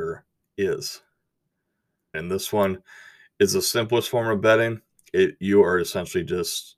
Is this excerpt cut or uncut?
cut